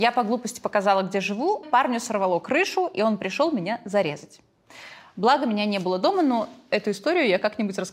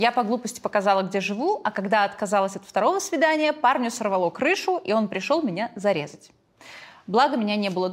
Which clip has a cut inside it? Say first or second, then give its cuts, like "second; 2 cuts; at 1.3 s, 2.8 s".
first; 1 cut; at 1.6 s